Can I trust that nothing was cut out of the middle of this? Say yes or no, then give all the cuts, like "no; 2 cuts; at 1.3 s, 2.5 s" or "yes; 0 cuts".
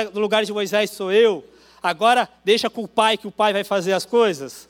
yes; 0 cuts